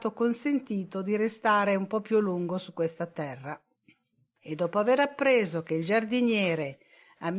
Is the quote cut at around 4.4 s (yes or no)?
yes